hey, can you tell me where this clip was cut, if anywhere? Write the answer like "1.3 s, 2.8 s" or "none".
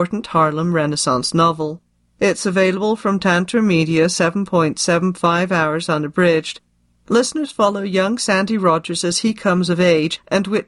6.9 s